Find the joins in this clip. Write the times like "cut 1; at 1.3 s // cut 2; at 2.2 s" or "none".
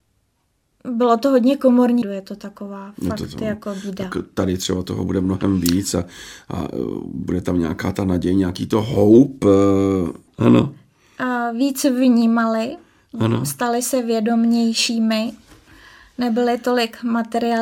cut 1; at 2.0 s // cut 2; at 10.3 s